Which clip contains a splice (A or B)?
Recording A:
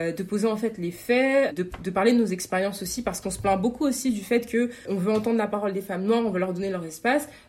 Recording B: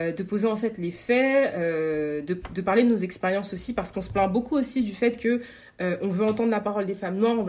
A